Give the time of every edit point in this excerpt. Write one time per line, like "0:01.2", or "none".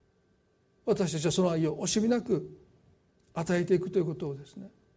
none